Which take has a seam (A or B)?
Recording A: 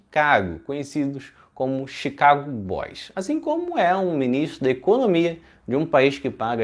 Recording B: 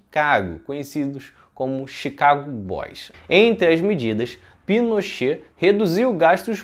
B